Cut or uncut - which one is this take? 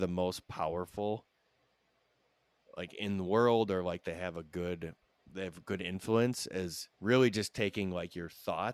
cut